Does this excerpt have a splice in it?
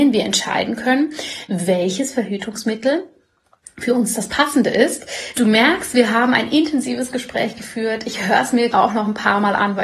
yes; 2 cuts; at 5.3 s, 8.7 s

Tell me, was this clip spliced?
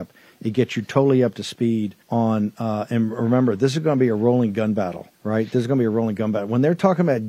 yes; 2 cuts; at 2.0 s, 5.1 s

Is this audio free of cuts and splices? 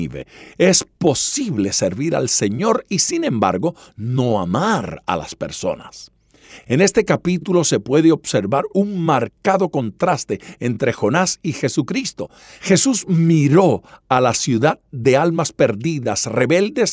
yes; 0 cuts

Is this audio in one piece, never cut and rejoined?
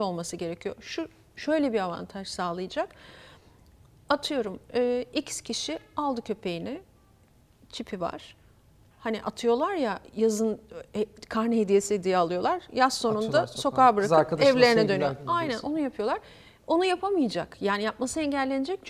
yes; 0 cuts

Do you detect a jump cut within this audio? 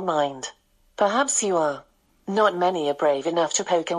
no; 0 cuts

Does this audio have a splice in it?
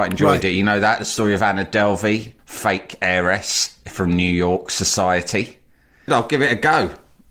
yes; 2 cuts; at 2.4 s, 6.1 s

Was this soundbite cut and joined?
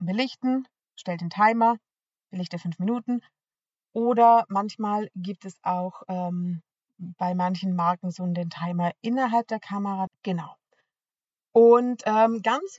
yes; 1 cut; at 10.1 s

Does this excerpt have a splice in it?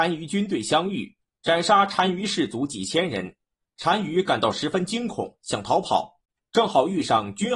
no; 0 cuts

